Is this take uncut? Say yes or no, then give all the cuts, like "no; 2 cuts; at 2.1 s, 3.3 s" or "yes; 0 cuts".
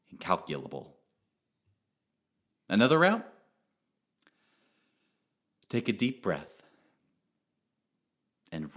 yes; 0 cuts